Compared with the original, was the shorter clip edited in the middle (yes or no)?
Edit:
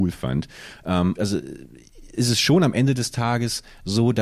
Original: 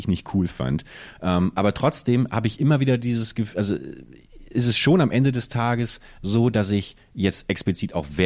yes